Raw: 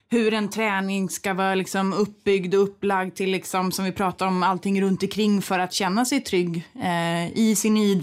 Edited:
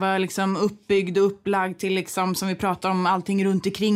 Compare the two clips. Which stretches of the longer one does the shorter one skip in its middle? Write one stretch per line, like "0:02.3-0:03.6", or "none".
none